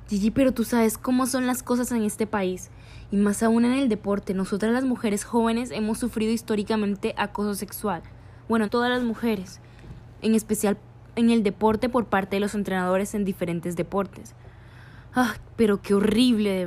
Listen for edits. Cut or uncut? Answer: cut